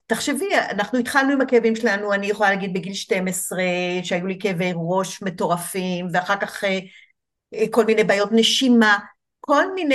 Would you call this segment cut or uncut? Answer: uncut